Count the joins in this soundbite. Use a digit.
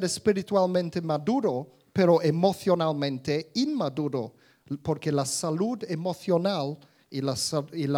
0